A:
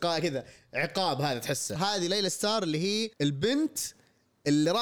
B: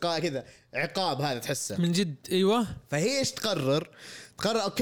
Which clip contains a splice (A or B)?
A